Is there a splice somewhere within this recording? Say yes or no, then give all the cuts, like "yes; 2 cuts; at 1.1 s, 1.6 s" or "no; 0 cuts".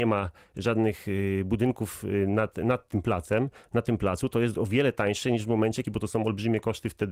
yes; 2 cuts; at 4.5 s, 5.8 s